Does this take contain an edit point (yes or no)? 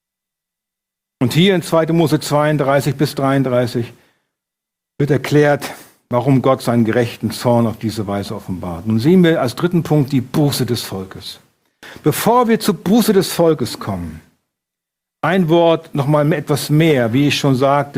no